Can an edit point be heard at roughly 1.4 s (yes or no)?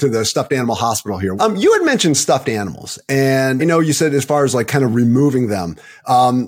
yes